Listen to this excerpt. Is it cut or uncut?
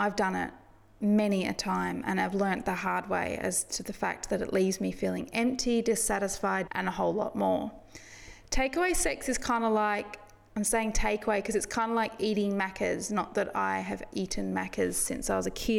cut